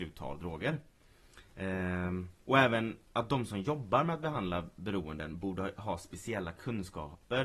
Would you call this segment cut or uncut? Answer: uncut